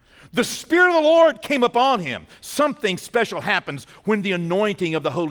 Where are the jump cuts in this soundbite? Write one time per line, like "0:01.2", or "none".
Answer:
none